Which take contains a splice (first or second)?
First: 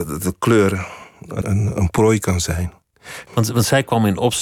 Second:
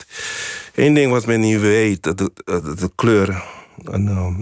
first